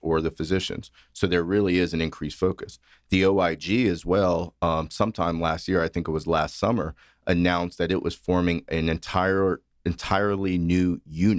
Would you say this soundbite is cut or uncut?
uncut